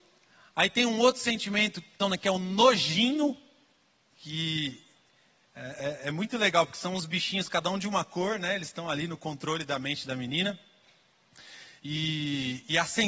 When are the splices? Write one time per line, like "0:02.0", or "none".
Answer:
0:02.0
0:04.1
0:11.8